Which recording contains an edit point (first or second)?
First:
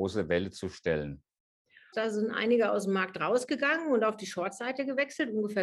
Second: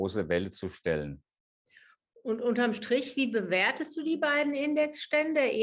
first